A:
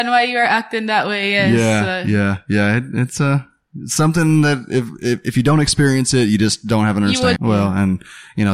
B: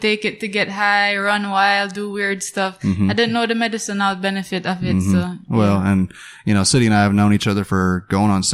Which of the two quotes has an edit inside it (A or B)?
A